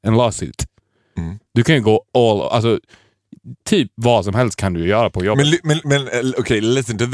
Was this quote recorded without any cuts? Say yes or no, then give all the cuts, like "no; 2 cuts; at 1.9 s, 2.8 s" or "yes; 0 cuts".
yes; 0 cuts